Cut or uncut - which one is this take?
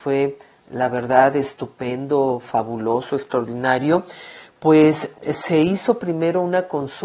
uncut